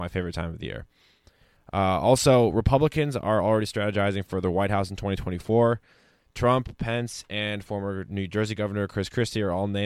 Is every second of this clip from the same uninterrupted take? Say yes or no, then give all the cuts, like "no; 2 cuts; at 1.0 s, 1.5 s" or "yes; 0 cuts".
yes; 0 cuts